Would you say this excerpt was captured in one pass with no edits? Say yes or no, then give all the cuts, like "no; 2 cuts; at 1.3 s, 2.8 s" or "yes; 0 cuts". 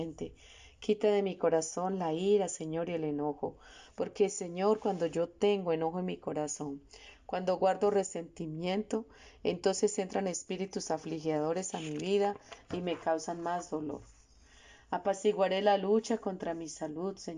no; 1 cut; at 3.9 s